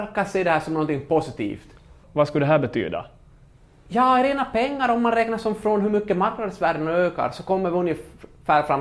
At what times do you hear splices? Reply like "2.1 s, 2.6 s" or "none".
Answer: 2.0 s